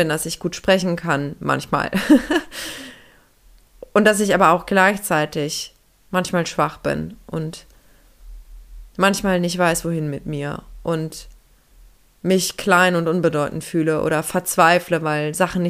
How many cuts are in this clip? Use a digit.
0